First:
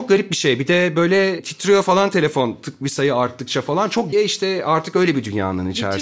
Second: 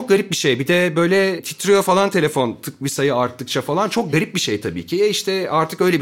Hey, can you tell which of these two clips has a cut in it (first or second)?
first